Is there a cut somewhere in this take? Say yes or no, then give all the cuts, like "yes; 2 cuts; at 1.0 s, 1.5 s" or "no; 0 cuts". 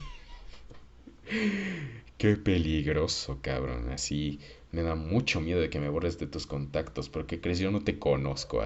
no; 0 cuts